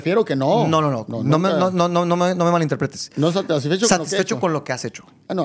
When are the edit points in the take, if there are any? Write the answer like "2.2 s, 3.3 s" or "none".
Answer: none